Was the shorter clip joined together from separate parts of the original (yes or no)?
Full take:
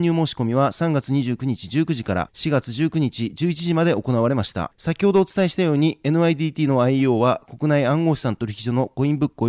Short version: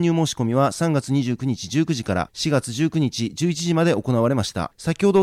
no